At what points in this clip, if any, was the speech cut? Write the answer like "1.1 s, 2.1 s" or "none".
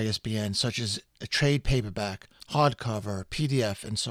2.4 s